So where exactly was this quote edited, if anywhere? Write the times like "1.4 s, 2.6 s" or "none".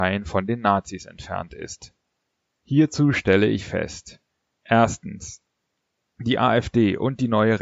none